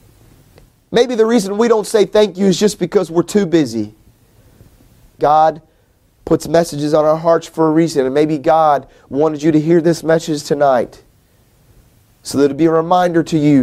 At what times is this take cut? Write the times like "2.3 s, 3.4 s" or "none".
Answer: 5.2 s